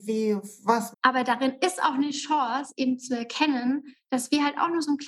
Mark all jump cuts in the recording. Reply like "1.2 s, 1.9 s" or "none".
0.9 s